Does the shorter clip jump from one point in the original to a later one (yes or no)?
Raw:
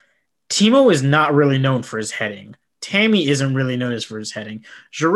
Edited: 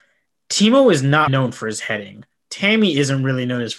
yes